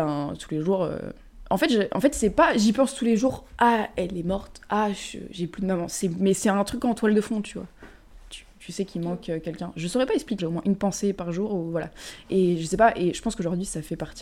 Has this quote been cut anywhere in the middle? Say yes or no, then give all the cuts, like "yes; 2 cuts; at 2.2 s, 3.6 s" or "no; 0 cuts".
yes; 1 cut; at 10.4 s